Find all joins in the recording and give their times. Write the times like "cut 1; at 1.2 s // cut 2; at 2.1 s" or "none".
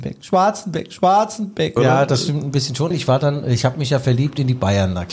cut 1; at 1.8 s // cut 2; at 2.9 s